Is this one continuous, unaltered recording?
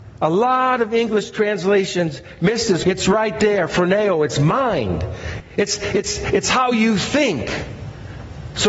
no; 2 cuts; at 2.8 s, 5.4 s

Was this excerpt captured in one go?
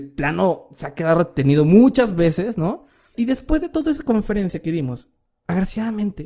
no; 1 cut; at 3.1 s

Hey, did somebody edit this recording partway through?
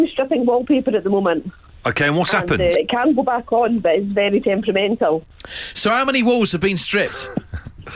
yes; 1 cut; at 2.7 s

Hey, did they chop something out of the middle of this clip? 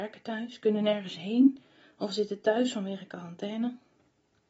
no; 0 cuts

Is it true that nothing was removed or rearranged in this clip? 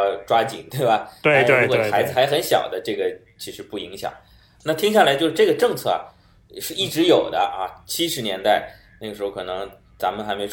yes; 0 cuts

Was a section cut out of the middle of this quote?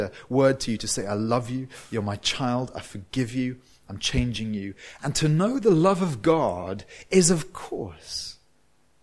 no; 0 cuts

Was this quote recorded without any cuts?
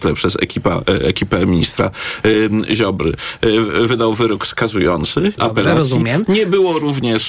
no; 1 cut; at 5.4 s

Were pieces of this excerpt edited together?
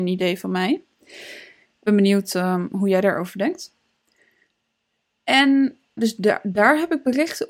yes; 1 cut; at 6.0 s

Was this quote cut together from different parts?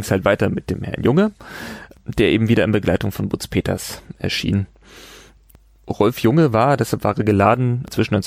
no; 0 cuts

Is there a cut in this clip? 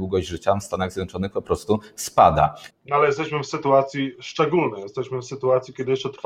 yes; 1 cut; at 2.7 s

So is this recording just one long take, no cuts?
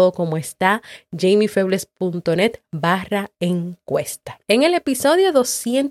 no; 1 cut; at 4.4 s

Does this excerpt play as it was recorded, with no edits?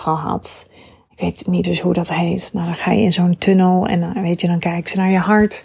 no; 1 cut; at 1.6 s

